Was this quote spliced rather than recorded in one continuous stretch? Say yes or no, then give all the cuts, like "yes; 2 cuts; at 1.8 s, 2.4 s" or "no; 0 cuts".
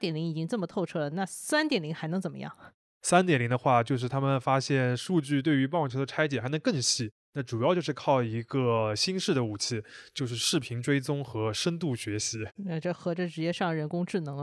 no; 0 cuts